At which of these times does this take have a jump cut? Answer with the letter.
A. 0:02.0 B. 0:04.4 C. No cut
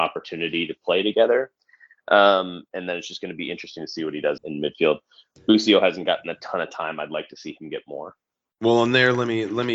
B